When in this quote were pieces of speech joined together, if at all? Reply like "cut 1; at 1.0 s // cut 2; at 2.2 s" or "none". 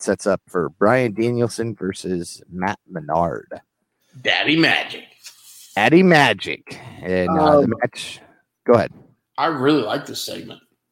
none